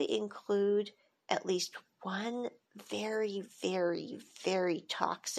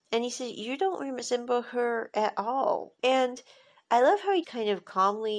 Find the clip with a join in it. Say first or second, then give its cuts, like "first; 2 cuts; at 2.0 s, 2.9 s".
second; 2 cuts; at 3.0 s, 4.4 s